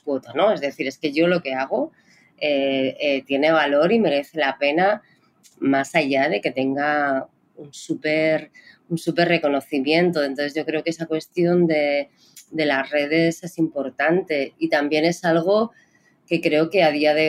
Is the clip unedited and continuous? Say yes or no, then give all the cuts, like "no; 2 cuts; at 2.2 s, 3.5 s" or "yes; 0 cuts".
yes; 0 cuts